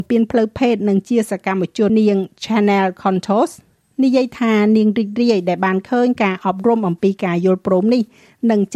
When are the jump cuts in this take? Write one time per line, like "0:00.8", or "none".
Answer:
0:01.9